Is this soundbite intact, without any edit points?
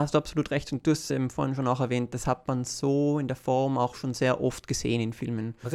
yes; 0 cuts

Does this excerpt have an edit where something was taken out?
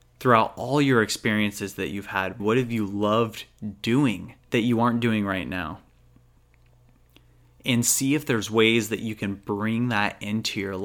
yes; 2 cuts; at 2.4 s, 4.4 s

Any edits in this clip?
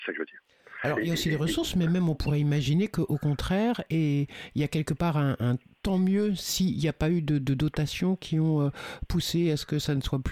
no; 0 cuts

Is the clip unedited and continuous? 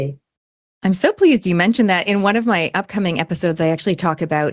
yes; 0 cuts

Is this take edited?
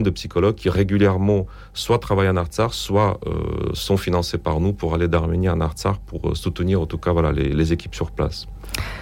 no; 0 cuts

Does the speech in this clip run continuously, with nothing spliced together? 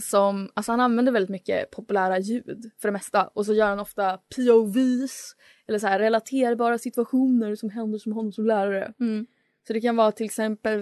yes; 0 cuts

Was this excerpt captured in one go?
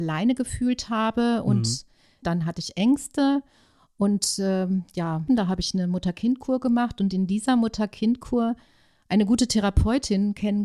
no; 2 cuts; at 2.2 s, 5.3 s

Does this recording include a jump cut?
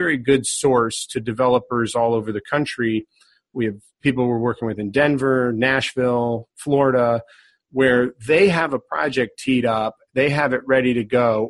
no; 0 cuts

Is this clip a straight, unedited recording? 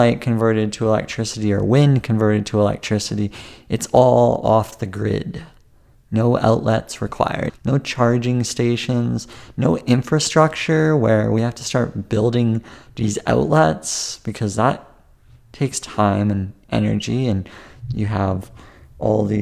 no; 1 cut; at 7.5 s

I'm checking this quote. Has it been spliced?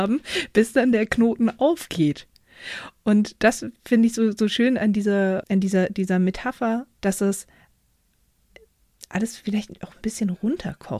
yes; 2 cuts; at 5.4 s, 7.0 s

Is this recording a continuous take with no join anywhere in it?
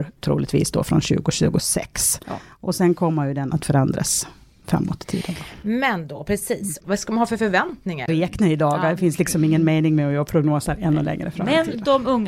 no; 2 cuts; at 6.8 s, 8.1 s

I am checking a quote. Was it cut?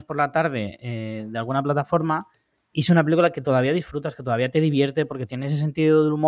no; 0 cuts

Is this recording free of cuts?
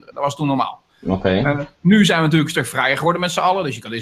yes; 0 cuts

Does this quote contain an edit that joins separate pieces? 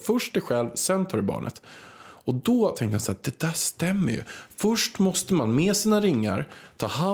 no; 0 cuts

